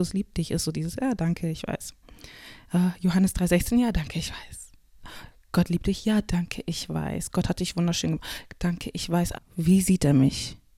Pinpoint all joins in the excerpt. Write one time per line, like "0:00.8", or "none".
0:09.3